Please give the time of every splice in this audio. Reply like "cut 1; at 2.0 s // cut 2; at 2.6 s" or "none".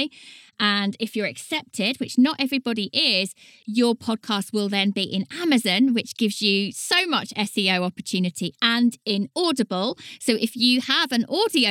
none